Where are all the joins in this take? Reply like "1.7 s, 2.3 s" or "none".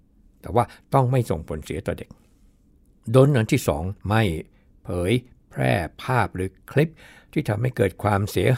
4.0 s